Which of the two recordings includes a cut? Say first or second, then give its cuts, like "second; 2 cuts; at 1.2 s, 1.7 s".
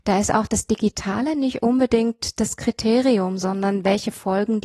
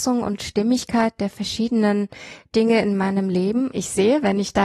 second; 1 cut; at 3.7 s